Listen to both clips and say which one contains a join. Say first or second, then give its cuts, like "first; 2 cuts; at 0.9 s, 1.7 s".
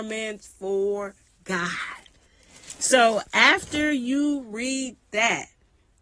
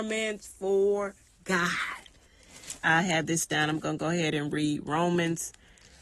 second; 1 cut; at 2.8 s